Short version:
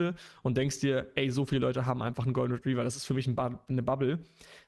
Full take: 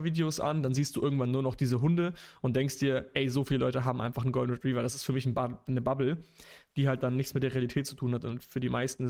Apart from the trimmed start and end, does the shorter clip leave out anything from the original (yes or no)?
no